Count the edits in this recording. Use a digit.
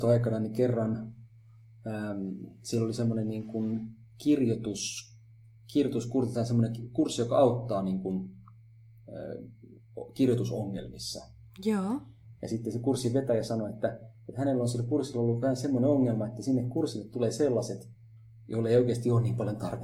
0